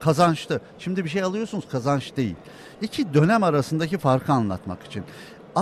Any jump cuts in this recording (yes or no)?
yes